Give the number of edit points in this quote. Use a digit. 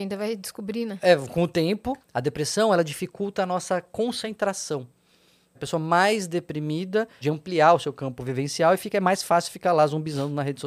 3